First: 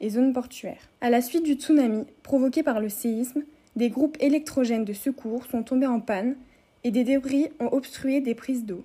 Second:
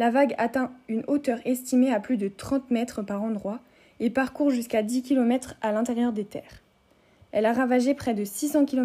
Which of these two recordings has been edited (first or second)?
first